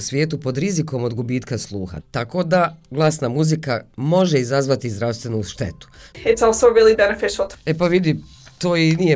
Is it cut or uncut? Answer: cut